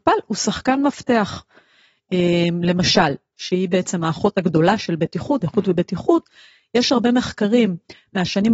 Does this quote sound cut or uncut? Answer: cut